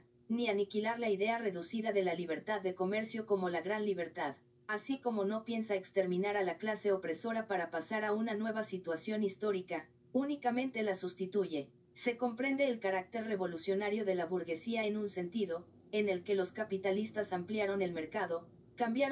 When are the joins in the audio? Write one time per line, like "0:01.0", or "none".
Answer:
0:11.9